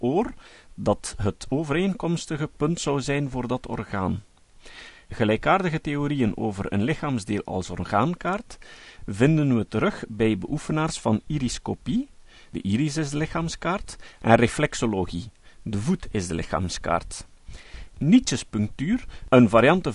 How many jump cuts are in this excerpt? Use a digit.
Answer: 0